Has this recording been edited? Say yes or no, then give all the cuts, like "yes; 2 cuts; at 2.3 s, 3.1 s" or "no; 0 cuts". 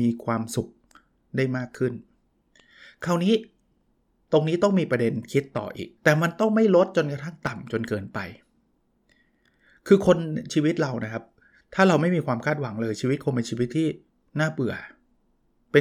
yes; 1 cut; at 6.0 s